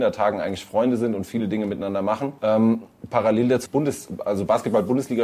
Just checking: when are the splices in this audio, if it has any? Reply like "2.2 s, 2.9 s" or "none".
2.4 s, 3.7 s